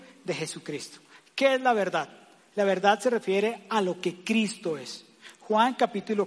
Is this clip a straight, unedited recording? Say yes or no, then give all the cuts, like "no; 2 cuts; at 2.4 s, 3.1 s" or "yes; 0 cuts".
yes; 0 cuts